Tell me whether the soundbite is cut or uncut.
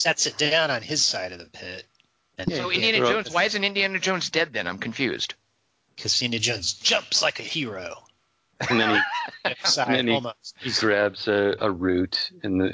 uncut